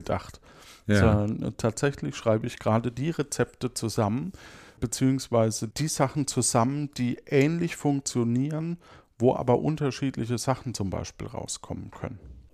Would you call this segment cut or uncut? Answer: uncut